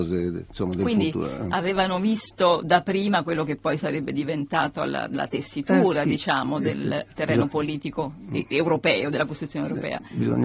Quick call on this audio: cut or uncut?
uncut